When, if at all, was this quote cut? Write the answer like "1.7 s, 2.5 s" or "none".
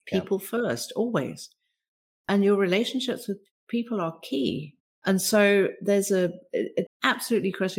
4.9 s, 6.9 s